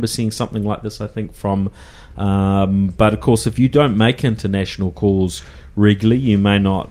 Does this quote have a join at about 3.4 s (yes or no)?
no